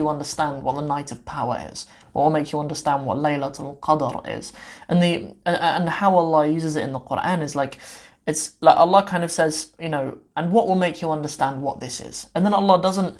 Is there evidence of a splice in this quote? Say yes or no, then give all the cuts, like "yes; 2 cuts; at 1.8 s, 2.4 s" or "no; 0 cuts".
no; 0 cuts